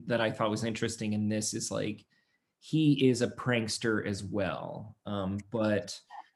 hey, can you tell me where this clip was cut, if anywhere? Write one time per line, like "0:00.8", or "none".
none